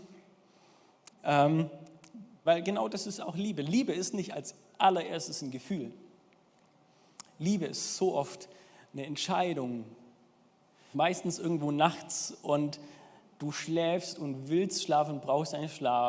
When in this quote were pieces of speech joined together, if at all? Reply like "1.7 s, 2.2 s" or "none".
1.1 s, 2.5 s, 10.9 s